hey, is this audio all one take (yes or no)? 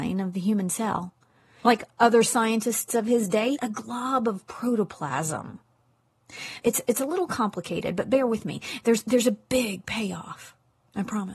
no